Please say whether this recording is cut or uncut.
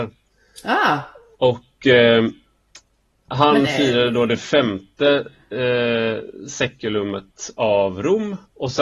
uncut